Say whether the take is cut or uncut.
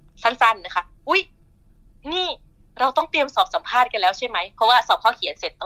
uncut